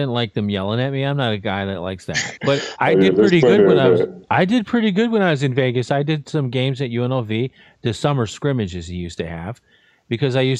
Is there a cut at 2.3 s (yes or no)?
yes